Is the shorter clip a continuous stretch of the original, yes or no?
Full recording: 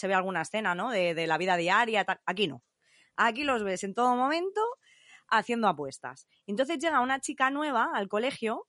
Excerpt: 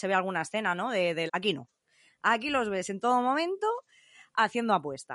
no